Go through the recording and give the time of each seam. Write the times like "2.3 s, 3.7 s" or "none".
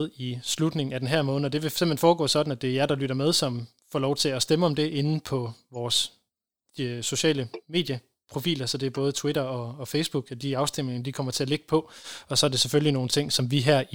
none